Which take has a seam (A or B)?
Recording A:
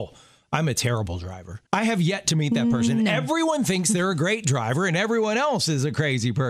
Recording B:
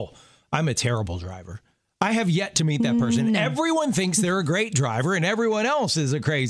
A